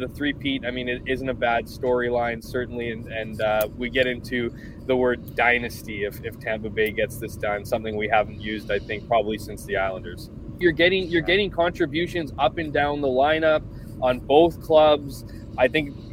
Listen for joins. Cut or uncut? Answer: cut